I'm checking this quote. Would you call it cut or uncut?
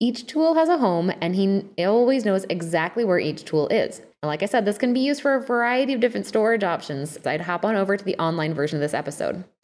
cut